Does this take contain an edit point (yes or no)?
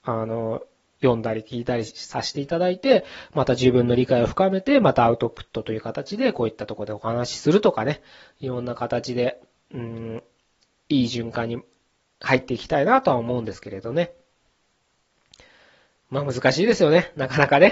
no